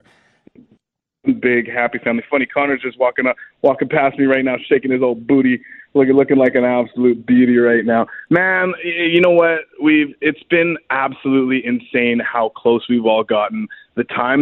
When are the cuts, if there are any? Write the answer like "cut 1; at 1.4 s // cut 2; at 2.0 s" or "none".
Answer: none

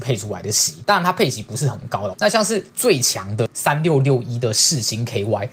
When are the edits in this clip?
cut 1; at 2.1 s

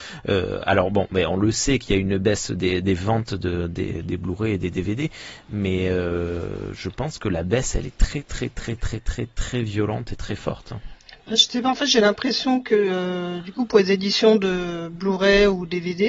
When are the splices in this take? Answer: none

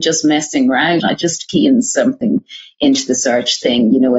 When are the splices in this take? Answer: cut 1; at 1.0 s

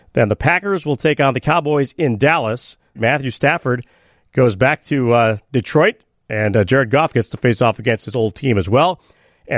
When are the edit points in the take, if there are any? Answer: cut 1; at 3.0 s

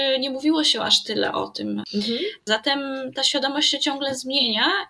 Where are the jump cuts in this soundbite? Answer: cut 1; at 1.9 s

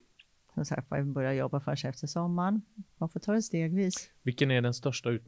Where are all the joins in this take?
cut 1; at 3.0 s

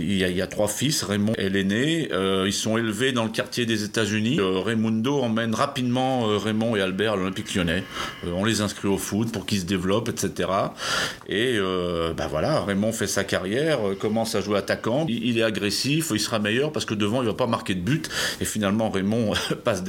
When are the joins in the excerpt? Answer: cut 1; at 15.1 s

